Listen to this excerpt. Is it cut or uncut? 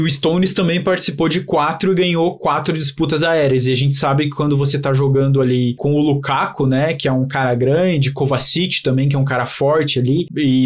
uncut